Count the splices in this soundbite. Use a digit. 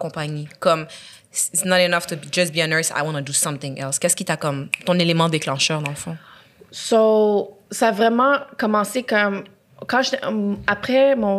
0